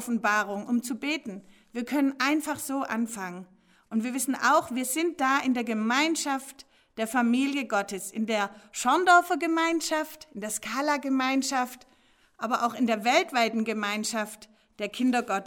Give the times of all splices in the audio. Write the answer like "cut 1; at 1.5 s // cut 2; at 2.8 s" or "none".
none